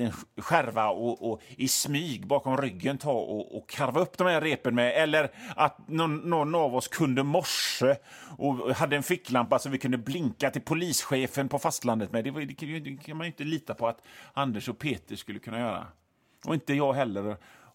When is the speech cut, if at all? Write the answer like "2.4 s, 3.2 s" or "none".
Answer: none